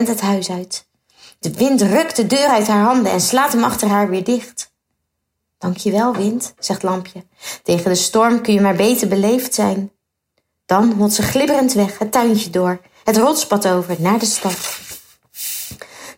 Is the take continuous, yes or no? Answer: yes